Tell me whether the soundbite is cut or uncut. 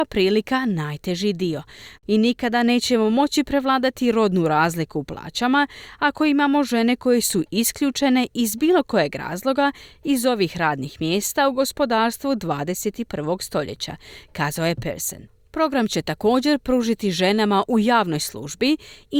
cut